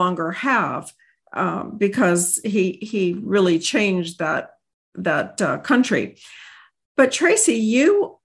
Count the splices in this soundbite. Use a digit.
0